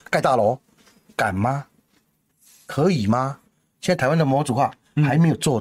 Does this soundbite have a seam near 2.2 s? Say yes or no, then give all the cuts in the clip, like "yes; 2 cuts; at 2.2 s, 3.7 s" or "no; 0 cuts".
no; 0 cuts